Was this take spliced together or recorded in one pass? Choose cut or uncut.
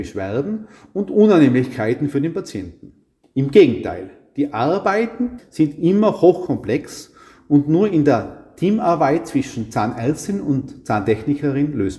cut